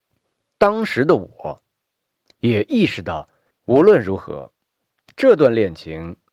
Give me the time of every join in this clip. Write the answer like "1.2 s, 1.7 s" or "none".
3.5 s